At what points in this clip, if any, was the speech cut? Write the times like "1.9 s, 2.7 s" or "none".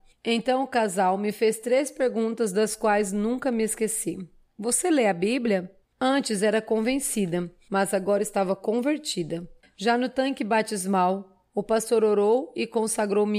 5.9 s, 9.6 s, 11.5 s

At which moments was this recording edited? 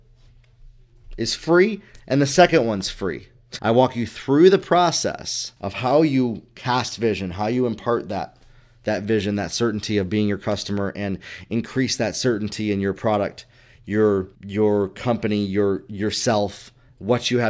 3.6 s, 5.6 s, 14.4 s

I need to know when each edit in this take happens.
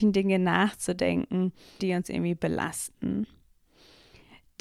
1.8 s

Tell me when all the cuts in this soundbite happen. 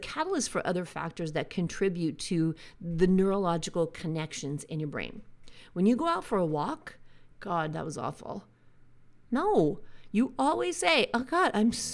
7.3 s

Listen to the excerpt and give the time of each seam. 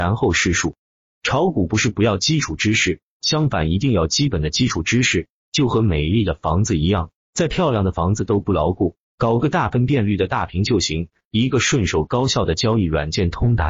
7.2 s, 9.0 s

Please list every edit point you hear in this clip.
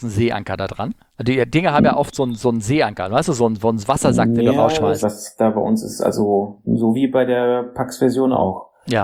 5.0 s

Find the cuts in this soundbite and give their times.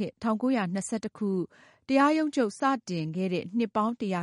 none

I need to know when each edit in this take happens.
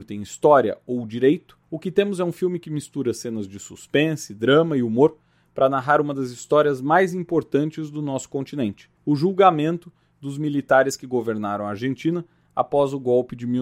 1.6 s, 9.0 s

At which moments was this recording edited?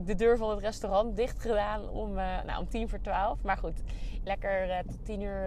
4.3 s

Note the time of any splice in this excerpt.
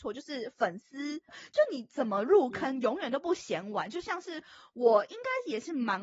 1.3 s

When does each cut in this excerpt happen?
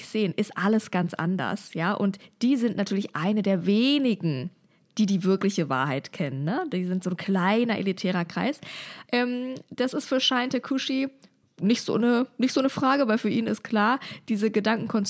9.1 s

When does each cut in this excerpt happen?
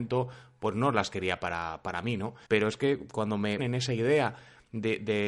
2.5 s, 3.6 s

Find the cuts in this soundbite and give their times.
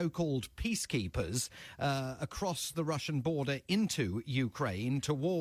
none

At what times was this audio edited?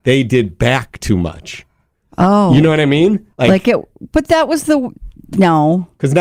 3.3 s

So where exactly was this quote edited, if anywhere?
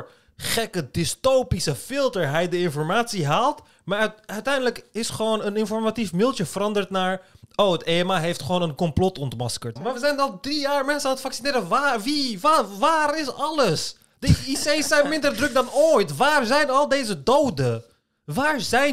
9.8 s

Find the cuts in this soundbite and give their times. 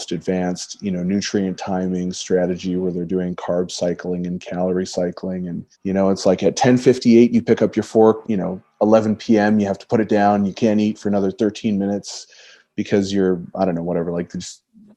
5.7 s, 8.2 s

